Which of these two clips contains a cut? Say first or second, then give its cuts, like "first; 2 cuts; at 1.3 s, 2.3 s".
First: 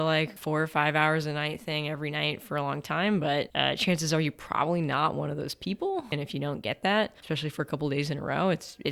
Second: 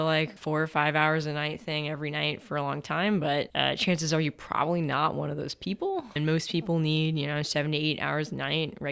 first; 1 cut; at 6.1 s